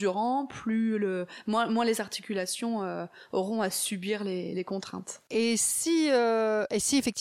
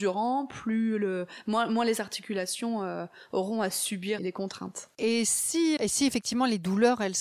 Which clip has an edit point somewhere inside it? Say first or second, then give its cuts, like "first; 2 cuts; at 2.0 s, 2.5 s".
second; 2 cuts; at 4.2 s, 5.8 s